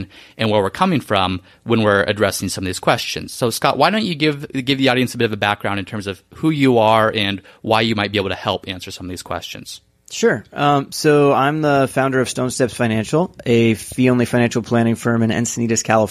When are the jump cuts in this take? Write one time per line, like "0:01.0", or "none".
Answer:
none